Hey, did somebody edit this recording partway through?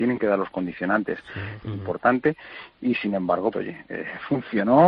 yes; 2 cuts; at 1.6 s, 3.5 s

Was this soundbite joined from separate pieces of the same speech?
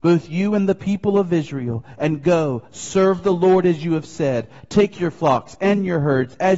no; 0 cuts

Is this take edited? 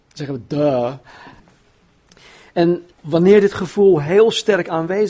yes; 2 cuts; at 1.4 s, 2.9 s

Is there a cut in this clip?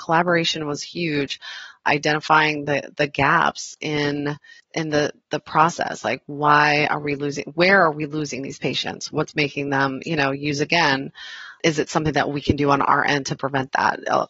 no; 0 cuts

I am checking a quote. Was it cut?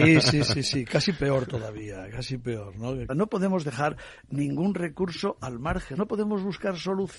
yes; 2 cuts; at 3.1 s, 5.9 s

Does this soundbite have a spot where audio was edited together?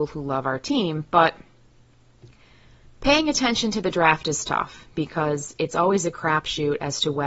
no; 0 cuts

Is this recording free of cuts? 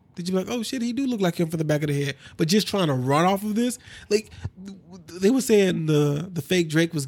yes; 0 cuts

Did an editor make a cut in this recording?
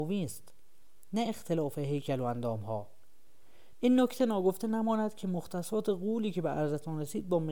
yes; 1 cut; at 3.7 s

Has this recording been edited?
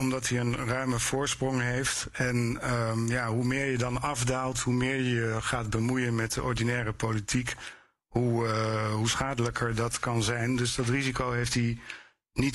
no; 0 cuts

